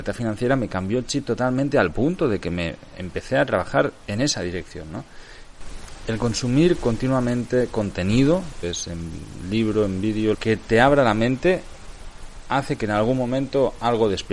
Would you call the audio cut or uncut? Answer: cut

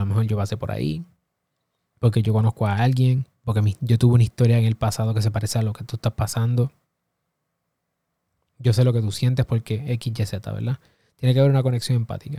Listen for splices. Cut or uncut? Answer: uncut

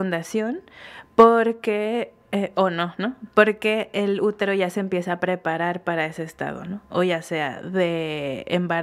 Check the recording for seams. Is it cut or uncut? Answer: uncut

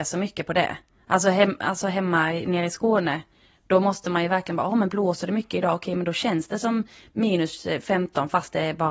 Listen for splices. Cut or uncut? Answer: uncut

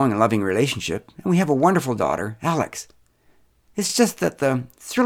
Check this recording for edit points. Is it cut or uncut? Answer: uncut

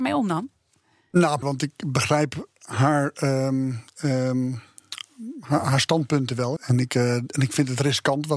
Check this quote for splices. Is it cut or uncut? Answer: cut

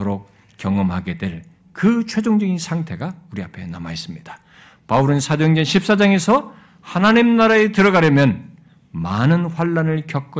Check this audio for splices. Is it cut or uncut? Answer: uncut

